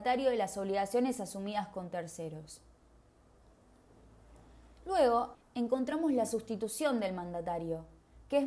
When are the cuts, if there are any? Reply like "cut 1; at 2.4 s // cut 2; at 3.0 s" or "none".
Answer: cut 1; at 5.3 s